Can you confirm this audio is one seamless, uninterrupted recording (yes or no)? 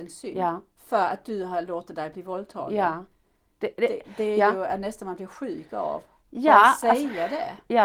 yes